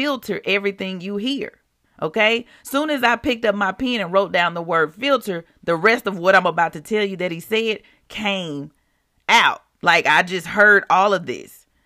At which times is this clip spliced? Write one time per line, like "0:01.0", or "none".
0:01.8